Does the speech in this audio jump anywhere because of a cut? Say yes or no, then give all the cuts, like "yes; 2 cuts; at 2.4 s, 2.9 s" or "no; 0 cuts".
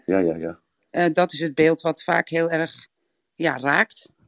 no; 0 cuts